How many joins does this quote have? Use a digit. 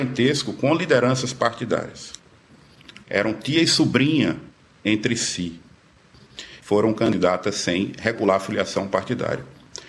2